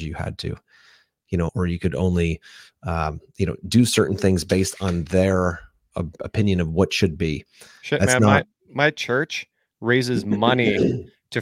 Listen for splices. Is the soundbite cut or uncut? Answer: cut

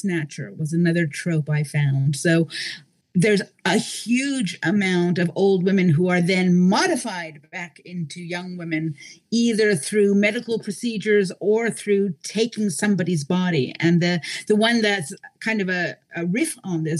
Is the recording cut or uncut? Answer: uncut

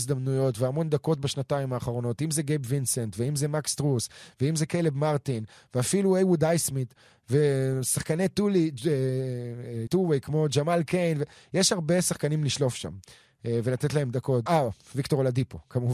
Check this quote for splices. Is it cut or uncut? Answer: cut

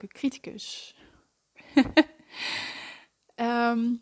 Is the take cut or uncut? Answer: cut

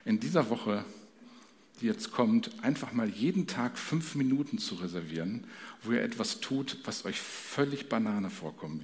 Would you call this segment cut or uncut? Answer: uncut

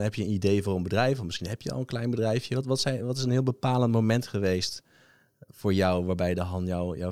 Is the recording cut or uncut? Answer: uncut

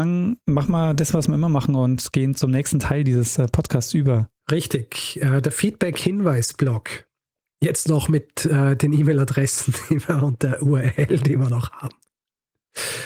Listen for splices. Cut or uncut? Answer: cut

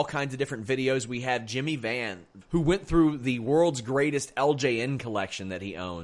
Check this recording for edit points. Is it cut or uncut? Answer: cut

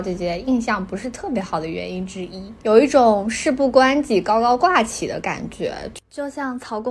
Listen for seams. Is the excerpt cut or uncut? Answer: uncut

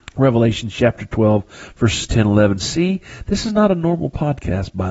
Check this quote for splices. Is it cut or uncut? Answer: uncut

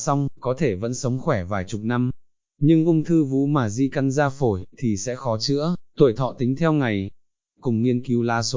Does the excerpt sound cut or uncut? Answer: uncut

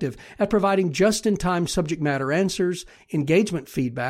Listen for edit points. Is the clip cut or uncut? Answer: uncut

